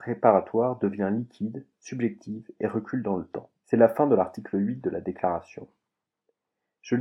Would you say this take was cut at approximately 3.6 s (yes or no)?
no